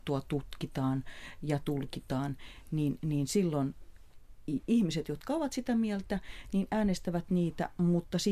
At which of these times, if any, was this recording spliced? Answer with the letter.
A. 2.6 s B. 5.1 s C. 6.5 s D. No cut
D